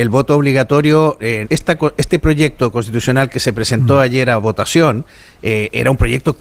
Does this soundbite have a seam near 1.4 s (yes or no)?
yes